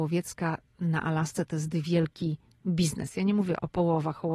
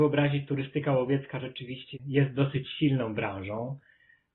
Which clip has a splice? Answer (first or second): second